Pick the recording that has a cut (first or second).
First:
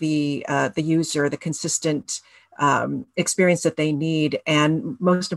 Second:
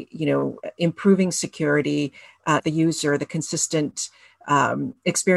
second